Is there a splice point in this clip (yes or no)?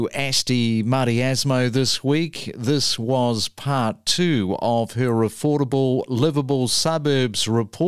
no